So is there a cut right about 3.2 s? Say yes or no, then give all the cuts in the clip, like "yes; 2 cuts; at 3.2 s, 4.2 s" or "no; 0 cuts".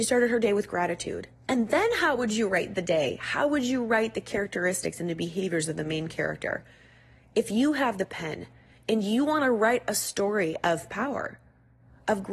no; 1 cut; at 1.5 s